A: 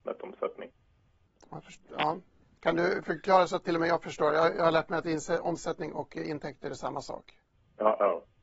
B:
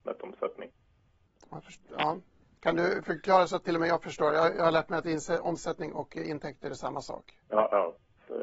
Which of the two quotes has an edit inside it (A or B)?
B